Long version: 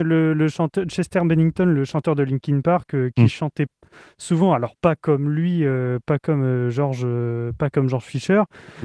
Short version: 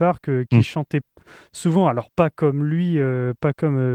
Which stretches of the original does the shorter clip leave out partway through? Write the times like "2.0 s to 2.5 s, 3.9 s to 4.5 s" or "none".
none